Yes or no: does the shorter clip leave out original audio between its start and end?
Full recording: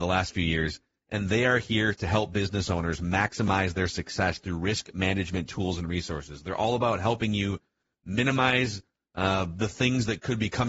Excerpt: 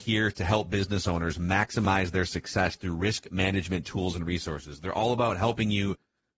no